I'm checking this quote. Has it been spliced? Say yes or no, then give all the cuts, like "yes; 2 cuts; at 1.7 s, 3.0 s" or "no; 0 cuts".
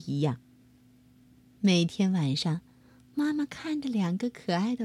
no; 0 cuts